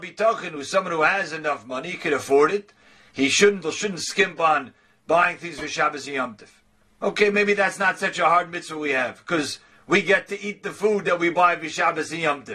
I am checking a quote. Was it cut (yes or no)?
yes